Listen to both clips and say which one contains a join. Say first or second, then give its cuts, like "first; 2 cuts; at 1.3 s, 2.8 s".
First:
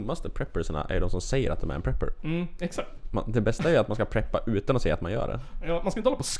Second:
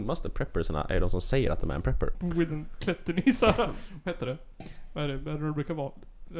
second; 1 cut; at 2.1 s